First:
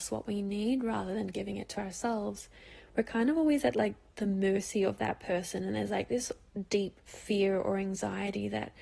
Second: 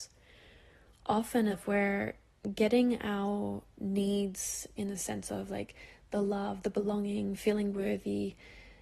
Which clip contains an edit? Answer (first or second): second